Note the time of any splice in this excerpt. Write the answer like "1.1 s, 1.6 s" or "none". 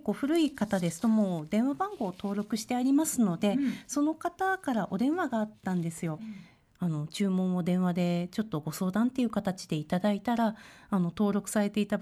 6.2 s